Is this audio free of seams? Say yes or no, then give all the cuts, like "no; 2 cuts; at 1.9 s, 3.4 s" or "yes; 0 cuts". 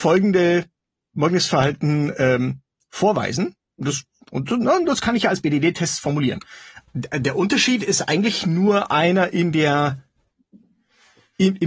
no; 1 cut; at 6.8 s